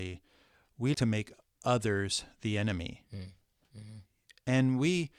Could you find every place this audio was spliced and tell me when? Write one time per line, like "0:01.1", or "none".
0:00.9

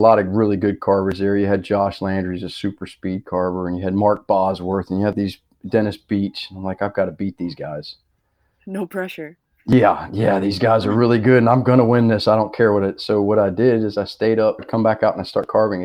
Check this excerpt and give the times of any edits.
0:14.6

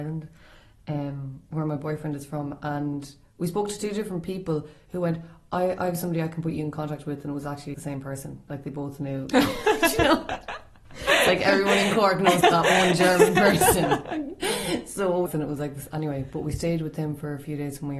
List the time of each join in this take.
0:07.7
0:12.4
0:15.3

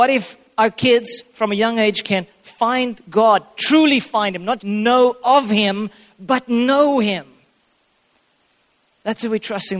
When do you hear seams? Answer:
0:04.6

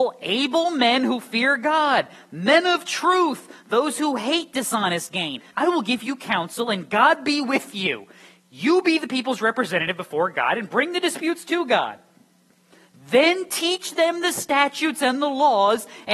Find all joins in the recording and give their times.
0:05.5

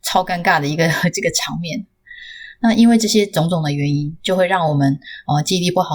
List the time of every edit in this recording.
none

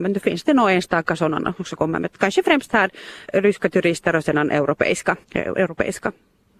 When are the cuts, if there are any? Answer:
0:03.2
0:05.2

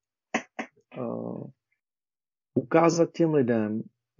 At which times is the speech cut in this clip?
none

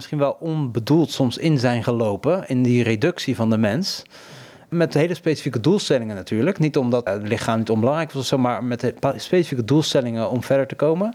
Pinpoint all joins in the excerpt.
0:07.1

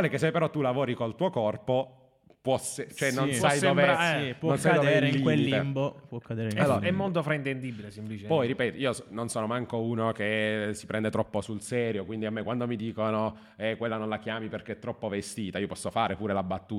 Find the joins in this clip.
none

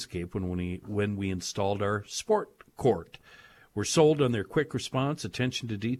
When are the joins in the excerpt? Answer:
none

